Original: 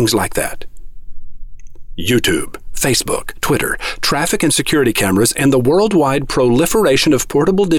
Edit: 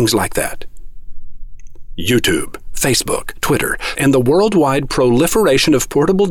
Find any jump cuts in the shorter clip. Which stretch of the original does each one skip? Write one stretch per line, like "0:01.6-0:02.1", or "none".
0:03.9-0:05.3